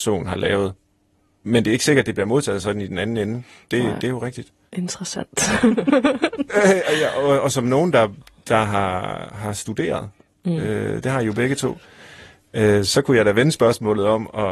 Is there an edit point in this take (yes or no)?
no